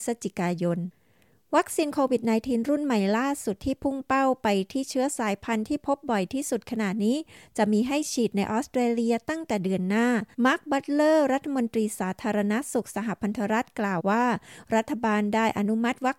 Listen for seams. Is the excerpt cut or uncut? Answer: cut